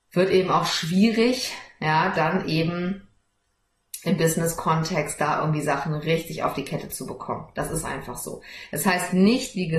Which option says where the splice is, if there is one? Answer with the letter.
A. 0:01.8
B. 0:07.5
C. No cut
C